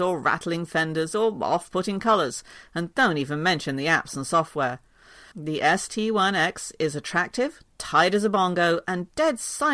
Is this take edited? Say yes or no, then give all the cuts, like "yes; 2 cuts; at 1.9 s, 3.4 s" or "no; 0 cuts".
yes; 1 cut; at 5.3 s